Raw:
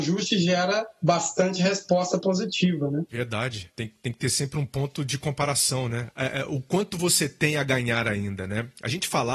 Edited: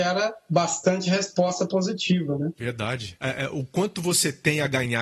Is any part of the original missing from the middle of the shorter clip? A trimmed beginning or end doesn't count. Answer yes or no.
yes